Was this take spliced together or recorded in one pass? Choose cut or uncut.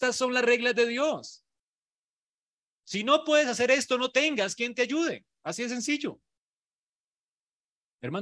uncut